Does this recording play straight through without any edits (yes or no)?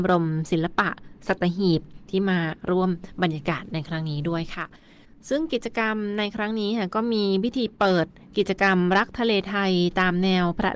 yes